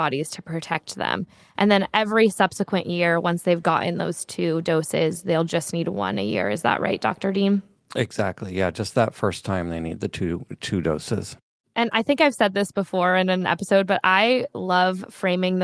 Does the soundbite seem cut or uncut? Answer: uncut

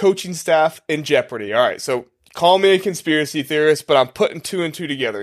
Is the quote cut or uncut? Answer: uncut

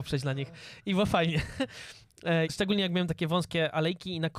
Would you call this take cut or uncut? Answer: cut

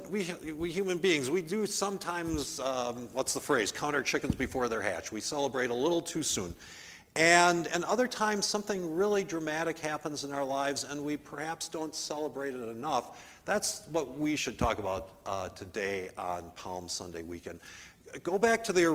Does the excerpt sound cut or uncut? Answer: uncut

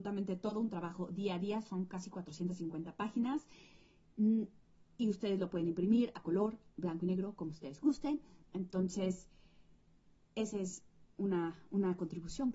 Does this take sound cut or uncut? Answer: uncut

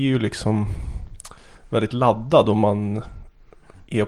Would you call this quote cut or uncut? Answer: uncut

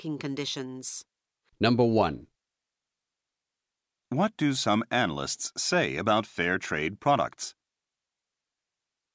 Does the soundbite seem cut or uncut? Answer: cut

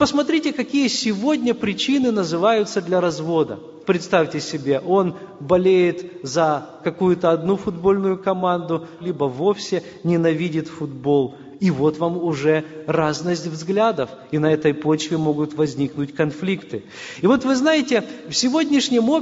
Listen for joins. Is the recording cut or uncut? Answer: cut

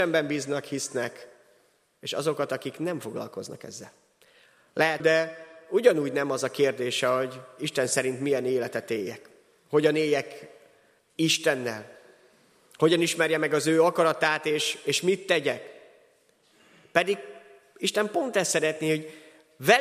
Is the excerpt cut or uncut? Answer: cut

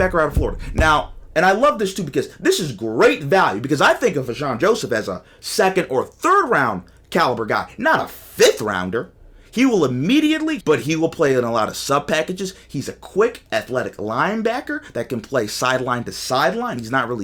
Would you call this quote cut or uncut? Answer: cut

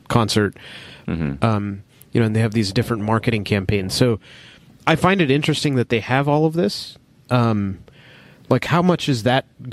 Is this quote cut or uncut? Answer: cut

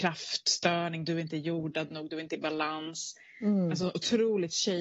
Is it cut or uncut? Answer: uncut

